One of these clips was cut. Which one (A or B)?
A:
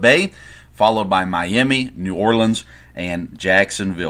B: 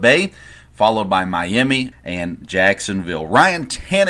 B